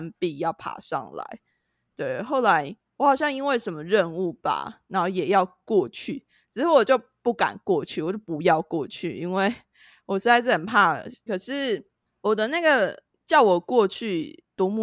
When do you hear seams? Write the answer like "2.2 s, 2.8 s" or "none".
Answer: 11.3 s